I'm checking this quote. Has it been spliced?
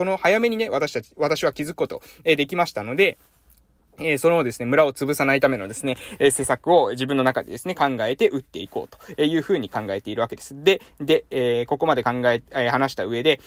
no; 0 cuts

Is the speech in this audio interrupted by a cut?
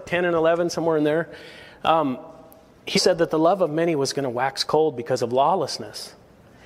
yes; 1 cut; at 3.0 s

